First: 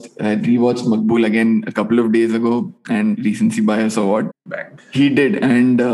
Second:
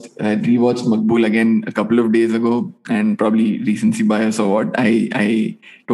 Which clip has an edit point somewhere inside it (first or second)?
first